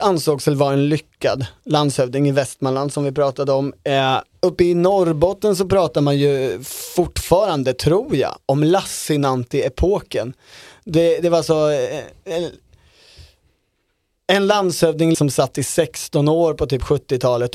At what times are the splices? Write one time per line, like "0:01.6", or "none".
0:15.1